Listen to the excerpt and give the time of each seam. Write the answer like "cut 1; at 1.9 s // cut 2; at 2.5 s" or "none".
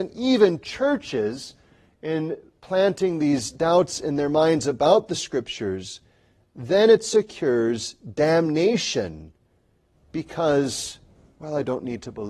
none